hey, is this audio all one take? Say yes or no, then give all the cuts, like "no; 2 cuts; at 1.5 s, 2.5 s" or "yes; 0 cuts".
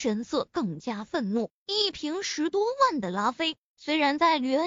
no; 1 cut; at 1.6 s